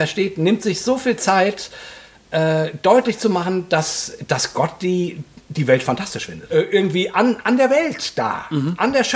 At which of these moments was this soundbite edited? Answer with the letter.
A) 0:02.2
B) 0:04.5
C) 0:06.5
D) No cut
C